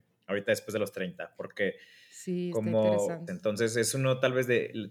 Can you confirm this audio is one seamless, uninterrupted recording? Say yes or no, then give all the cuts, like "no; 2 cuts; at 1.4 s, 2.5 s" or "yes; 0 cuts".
no; 1 cut; at 3.3 s